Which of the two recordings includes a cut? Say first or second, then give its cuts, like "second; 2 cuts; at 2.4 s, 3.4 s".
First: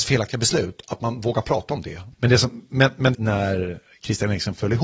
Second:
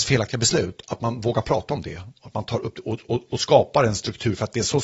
first; 2 cuts; at 2.1 s, 3.1 s